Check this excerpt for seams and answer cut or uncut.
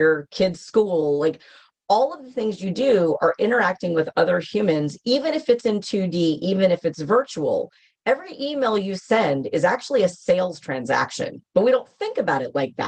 uncut